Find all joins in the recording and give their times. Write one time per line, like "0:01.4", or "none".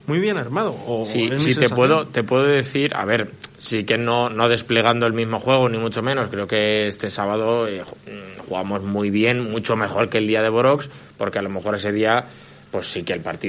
none